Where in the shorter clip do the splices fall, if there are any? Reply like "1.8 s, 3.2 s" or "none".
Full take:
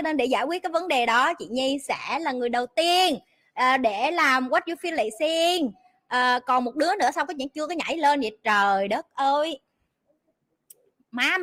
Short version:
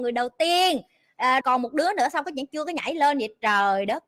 1.4 s